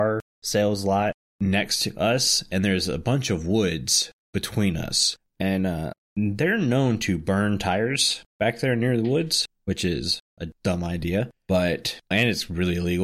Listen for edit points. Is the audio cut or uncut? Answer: cut